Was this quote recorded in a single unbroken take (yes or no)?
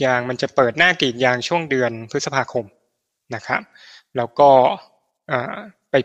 yes